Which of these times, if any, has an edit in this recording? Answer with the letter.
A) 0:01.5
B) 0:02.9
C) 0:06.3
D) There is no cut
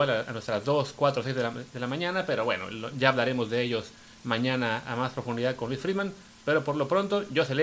B